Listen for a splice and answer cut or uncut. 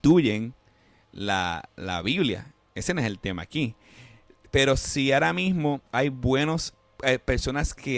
cut